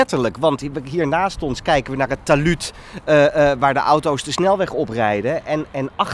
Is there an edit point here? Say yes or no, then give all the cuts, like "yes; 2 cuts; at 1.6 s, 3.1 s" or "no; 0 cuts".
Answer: no; 0 cuts